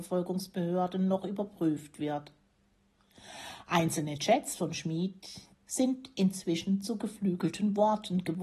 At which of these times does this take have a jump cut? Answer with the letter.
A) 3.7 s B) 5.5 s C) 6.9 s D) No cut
B